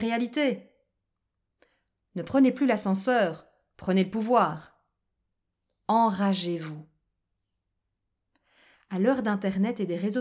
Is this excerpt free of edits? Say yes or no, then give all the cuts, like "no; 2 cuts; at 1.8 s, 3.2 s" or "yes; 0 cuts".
yes; 0 cuts